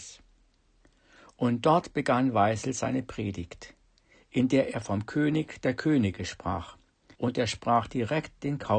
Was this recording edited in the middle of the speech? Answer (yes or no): yes